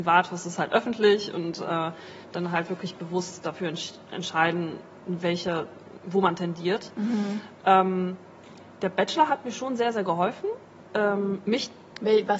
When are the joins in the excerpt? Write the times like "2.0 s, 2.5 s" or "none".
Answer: none